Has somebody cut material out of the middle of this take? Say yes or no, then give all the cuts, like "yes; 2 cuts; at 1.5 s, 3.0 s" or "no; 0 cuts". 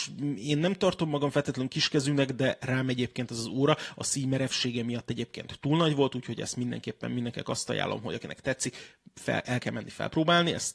no; 0 cuts